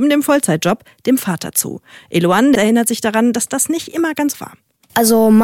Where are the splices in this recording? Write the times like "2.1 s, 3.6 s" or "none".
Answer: 2.6 s, 4.3 s